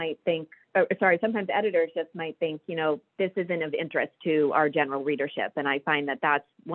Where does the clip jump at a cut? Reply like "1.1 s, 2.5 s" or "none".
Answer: none